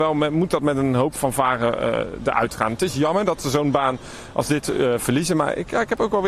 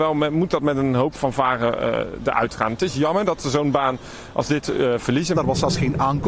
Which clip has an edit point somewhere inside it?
second; 1 cut; at 5.3 s

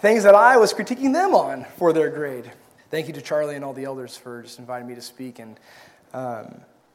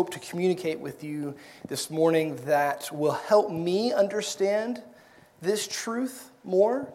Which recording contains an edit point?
first; 1 cut; at 2.8 s

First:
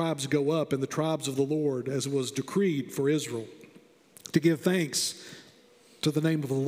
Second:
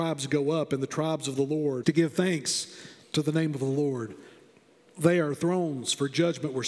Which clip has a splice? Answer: second; 2 cuts; at 1.8 s, 3.0 s

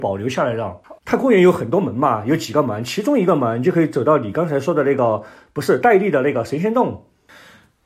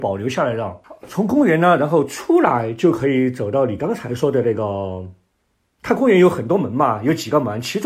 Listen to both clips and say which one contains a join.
first; 1 cut; at 1.0 s

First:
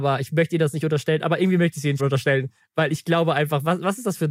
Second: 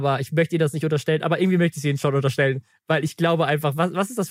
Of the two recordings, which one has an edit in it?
first; 1 cut; at 2.0 s

